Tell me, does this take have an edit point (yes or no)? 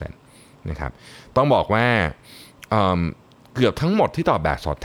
no